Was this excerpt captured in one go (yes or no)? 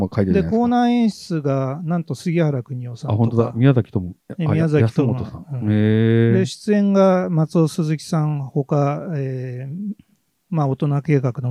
yes